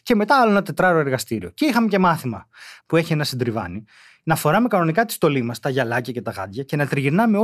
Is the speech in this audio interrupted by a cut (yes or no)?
yes